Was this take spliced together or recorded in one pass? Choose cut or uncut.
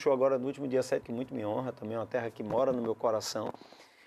cut